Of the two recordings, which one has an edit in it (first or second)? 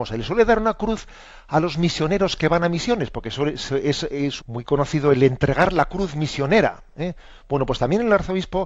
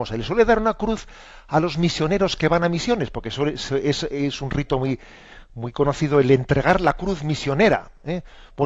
first